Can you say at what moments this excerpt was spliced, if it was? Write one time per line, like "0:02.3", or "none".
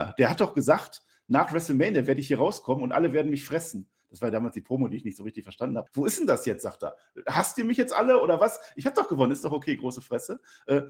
0:05.9